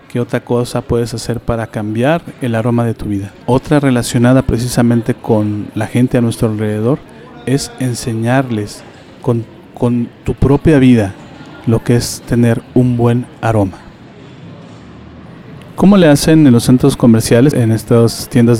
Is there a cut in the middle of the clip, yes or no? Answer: yes